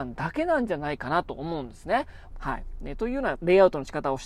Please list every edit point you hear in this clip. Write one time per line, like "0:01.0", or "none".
0:02.3
0:03.4